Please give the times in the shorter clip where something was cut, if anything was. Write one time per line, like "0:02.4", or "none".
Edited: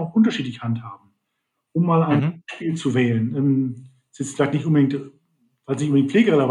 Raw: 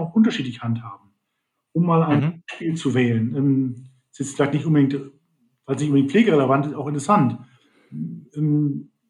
none